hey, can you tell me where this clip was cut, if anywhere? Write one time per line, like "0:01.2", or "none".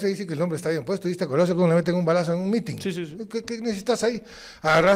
none